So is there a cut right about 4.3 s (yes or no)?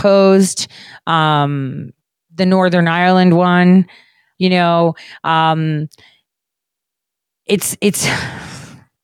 yes